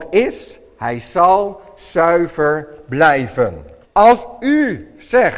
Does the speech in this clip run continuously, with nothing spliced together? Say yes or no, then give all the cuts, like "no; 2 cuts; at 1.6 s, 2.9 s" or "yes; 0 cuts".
no; 1 cut; at 3.8 s